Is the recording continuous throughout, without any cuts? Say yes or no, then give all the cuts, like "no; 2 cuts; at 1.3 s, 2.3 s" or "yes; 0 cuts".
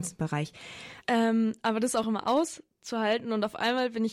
no; 2 cuts; at 1.0 s, 2.0 s